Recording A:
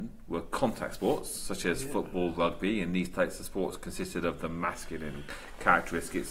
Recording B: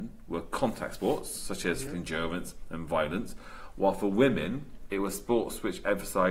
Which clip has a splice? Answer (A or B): B